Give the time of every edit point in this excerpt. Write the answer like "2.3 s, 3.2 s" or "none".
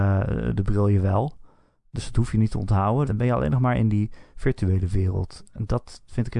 3.1 s